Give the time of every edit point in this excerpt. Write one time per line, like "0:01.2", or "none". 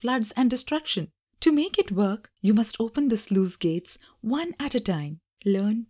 none